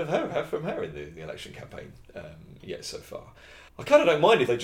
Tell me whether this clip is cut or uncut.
cut